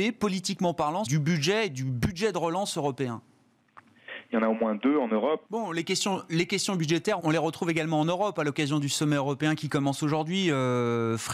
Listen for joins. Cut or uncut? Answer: cut